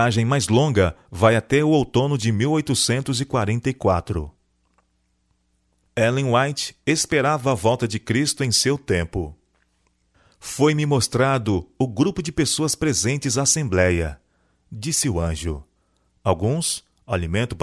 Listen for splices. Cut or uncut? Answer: uncut